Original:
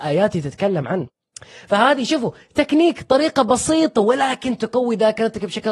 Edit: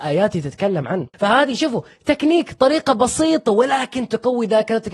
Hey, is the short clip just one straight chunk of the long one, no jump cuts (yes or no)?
no